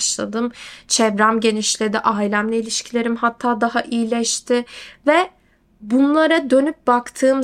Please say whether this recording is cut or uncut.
uncut